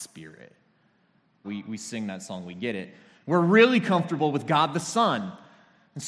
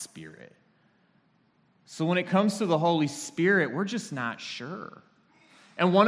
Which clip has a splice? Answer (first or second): first